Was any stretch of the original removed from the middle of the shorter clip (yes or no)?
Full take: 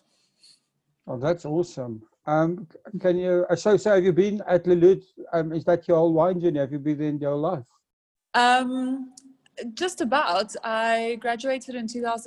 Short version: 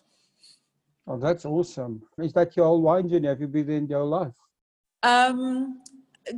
yes